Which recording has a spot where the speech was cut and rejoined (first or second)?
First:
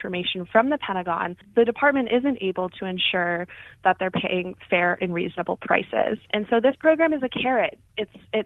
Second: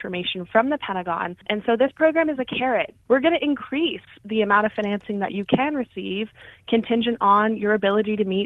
second